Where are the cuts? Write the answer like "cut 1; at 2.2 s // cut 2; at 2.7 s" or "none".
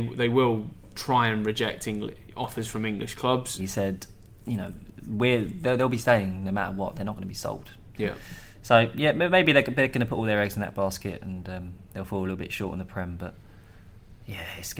cut 1; at 3.6 s // cut 2; at 7.9 s